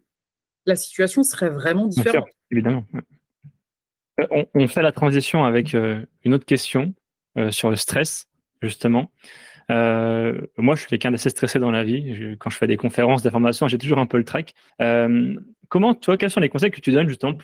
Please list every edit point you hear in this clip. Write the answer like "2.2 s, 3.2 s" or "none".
14.7 s, 16.2 s